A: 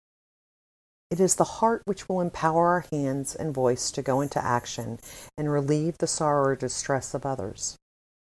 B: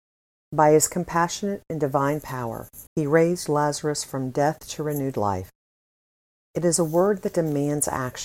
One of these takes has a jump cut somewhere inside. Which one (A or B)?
B